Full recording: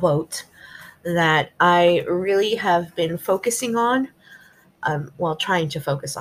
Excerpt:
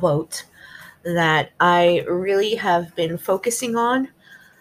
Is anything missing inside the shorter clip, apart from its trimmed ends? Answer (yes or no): no